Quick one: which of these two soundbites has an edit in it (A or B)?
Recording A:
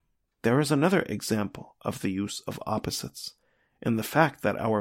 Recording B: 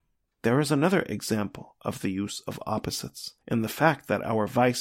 B